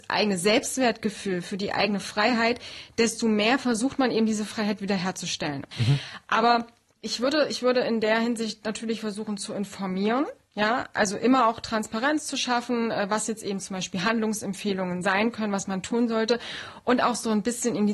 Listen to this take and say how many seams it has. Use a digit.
1